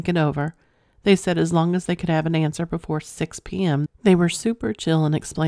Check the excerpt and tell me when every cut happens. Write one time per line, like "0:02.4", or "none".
0:03.9